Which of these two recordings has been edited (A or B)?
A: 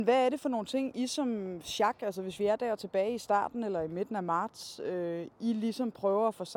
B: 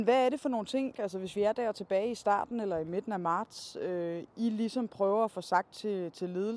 B